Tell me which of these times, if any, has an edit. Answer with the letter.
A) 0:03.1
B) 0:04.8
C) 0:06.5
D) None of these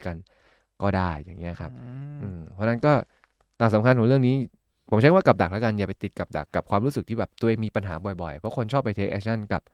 C